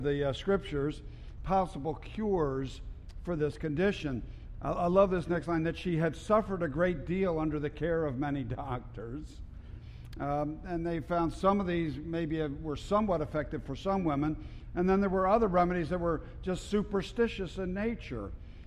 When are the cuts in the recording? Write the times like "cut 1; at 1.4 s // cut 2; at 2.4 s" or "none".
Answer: cut 1; at 1.4 s // cut 2; at 4.5 s // cut 3; at 10.1 s

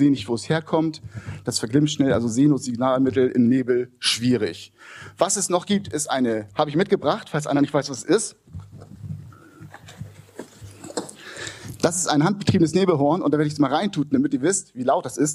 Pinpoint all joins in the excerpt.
cut 1; at 6.5 s

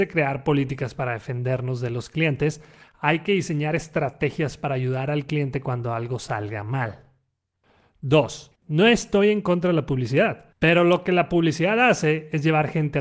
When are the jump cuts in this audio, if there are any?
cut 1; at 8.6 s // cut 2; at 10.5 s

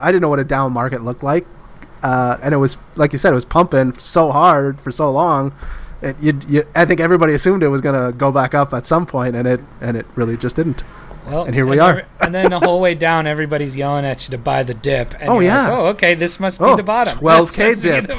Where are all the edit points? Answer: cut 1; at 2.4 s

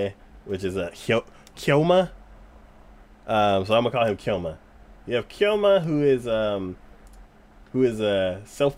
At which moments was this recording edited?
cut 1; at 1.6 s

